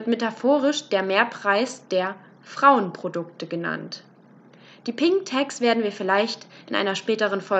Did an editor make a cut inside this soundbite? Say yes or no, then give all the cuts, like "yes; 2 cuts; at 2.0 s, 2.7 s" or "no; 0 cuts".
no; 0 cuts